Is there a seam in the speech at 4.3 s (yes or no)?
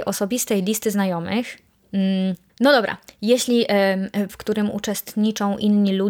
yes